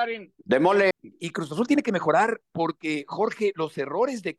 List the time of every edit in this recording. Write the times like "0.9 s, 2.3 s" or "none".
0.9 s